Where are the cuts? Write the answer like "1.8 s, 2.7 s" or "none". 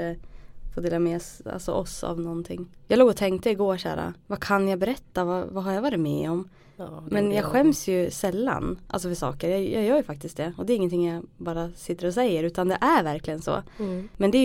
none